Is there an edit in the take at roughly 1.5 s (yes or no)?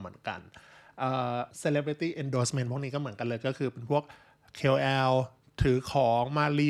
yes